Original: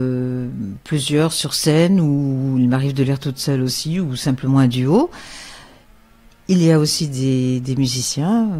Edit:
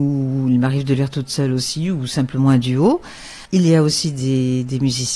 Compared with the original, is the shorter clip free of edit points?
no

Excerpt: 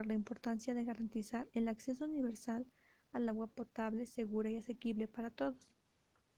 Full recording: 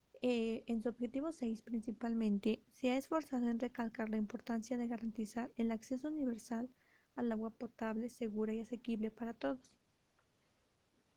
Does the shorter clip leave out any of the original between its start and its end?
no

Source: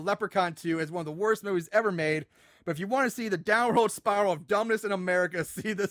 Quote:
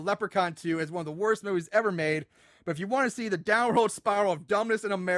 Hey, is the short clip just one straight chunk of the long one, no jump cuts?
yes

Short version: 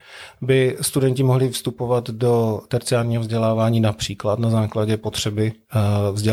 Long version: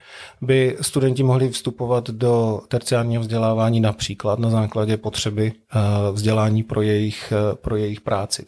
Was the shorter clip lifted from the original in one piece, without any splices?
yes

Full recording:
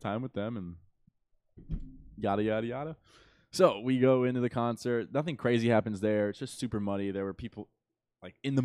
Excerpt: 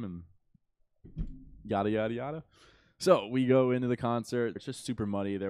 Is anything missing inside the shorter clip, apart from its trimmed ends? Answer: yes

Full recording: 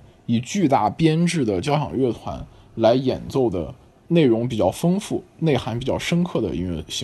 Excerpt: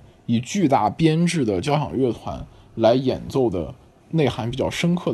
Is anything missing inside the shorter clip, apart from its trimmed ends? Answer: yes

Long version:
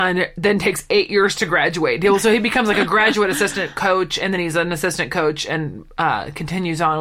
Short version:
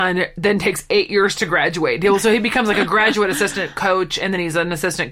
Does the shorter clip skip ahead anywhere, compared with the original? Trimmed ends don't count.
no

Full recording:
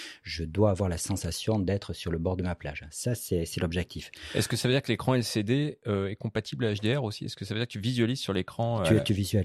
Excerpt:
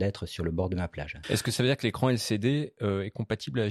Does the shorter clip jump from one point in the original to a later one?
yes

